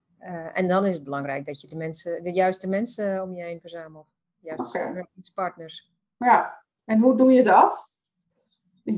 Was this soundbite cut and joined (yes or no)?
no